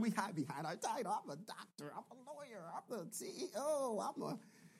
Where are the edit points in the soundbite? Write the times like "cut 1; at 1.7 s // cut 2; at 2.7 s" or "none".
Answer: none